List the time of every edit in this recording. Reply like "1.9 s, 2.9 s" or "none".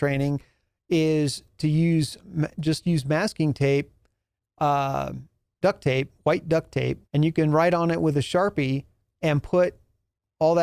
5.6 s, 7.0 s